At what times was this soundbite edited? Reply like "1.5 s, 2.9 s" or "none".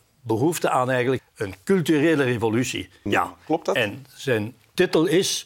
1.2 s, 3.1 s